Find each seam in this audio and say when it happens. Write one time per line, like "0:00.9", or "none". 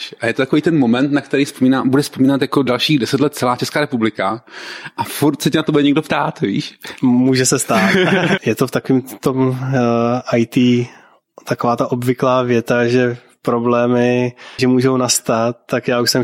0:08.4
0:14.6